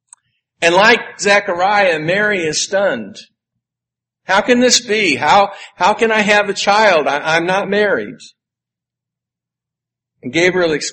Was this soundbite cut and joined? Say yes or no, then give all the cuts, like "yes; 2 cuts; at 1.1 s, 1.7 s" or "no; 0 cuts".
no; 0 cuts